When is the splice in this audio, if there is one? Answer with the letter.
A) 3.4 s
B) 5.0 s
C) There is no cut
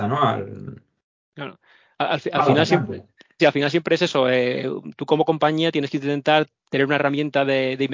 A